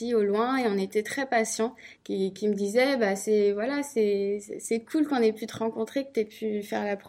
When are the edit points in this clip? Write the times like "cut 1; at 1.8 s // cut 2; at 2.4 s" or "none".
cut 1; at 2.0 s

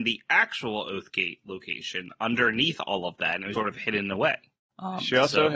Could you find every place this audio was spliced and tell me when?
cut 1; at 3.5 s

